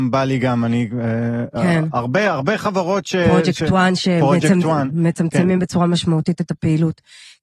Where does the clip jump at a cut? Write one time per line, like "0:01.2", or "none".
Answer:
none